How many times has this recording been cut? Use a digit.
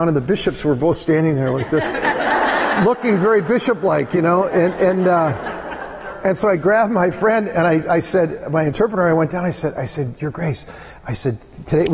0